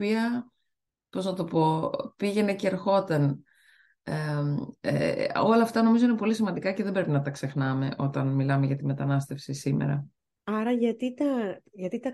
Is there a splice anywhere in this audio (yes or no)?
no